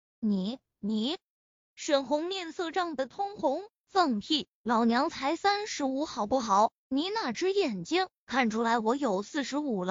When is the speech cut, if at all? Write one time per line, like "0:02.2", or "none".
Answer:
none